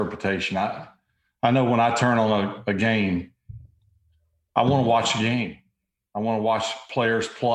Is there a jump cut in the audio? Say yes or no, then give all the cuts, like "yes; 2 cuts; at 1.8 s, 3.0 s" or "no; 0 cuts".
no; 0 cuts